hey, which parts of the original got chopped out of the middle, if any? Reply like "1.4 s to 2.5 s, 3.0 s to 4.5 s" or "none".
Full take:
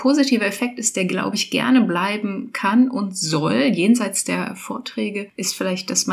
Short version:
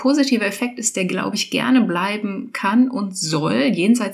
none